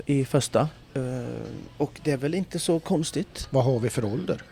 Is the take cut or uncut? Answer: uncut